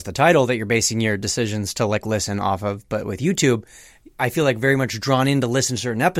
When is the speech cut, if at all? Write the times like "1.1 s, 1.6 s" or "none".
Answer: none